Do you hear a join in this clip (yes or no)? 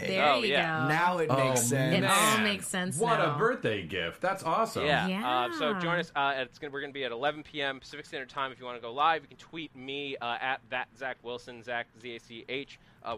no